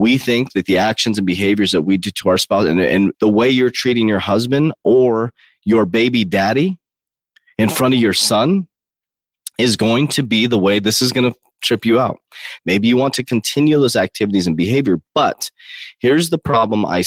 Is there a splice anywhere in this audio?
yes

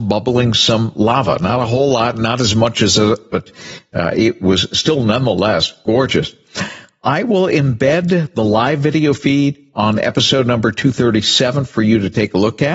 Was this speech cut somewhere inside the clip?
yes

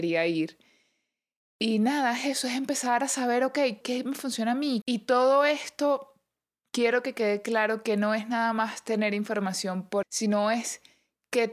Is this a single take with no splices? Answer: no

